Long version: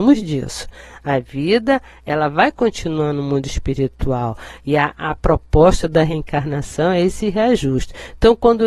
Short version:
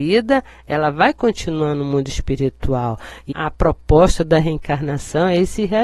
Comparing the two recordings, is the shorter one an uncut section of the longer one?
no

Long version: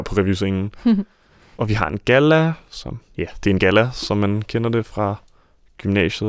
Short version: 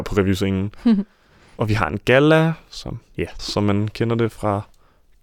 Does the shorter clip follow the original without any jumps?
no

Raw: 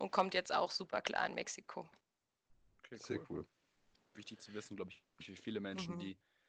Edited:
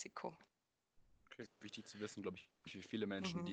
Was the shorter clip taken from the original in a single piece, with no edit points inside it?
no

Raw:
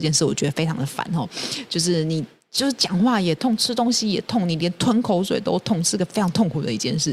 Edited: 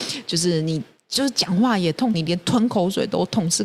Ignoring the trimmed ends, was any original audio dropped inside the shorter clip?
yes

